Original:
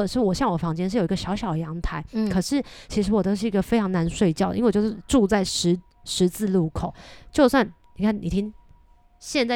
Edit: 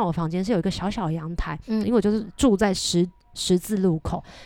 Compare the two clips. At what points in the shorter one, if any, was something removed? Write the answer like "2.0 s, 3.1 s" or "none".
1.8 s